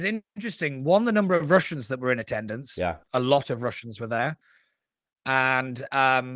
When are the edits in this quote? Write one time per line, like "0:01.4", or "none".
none